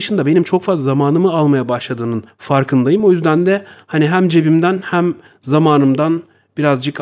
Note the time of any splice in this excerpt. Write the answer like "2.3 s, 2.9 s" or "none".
none